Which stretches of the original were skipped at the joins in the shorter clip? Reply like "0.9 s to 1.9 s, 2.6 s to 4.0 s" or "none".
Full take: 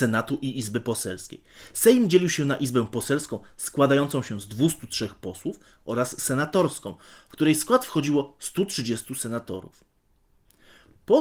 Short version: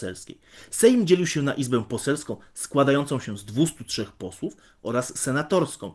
none

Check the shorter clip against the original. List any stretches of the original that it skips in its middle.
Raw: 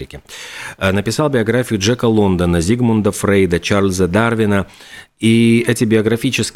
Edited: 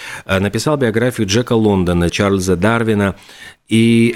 2.6 s to 3.6 s

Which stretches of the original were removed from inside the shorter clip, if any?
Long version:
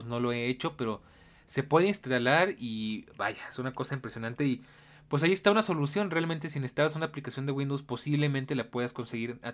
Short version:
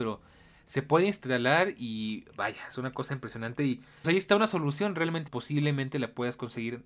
4.9 s to 5.2 s, 6.4 s to 7.8 s

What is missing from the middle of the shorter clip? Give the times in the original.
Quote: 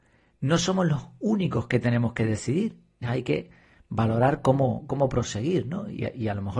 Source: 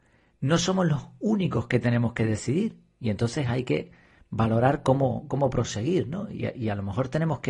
3.0 s to 3.4 s

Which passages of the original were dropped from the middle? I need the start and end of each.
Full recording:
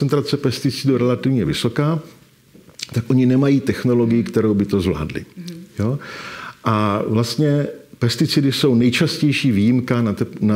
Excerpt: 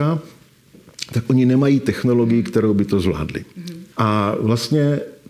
5.7 s to 6.6 s

